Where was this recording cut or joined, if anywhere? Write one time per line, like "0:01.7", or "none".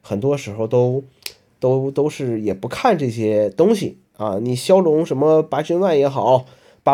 none